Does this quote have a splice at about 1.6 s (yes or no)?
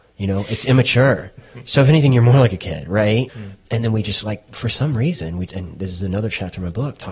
no